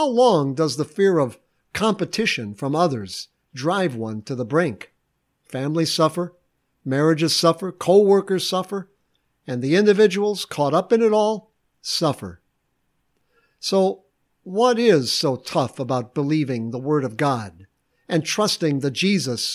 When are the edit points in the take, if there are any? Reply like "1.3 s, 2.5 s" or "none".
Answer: none